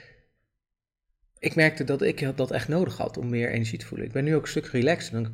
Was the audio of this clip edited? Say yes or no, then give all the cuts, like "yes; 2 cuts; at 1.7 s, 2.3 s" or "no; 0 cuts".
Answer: no; 0 cuts